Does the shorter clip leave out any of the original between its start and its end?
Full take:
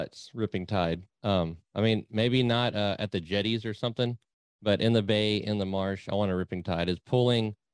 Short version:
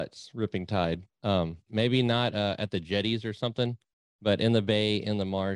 yes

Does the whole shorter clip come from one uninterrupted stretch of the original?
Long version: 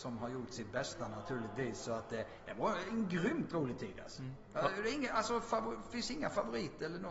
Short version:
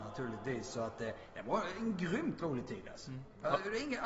yes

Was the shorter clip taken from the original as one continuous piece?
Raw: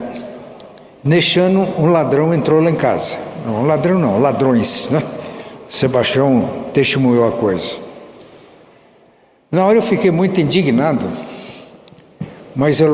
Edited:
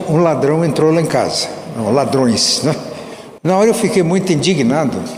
no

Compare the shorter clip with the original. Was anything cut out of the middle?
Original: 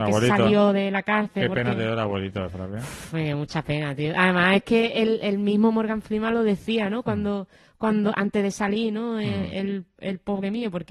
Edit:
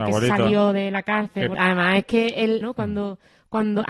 yes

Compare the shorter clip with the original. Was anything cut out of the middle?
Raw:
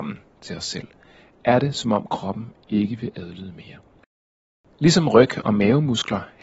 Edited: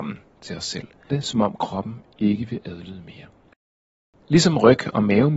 yes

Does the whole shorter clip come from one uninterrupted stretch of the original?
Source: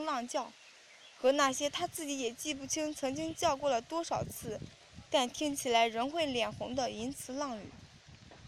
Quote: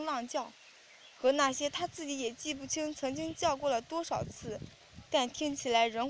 yes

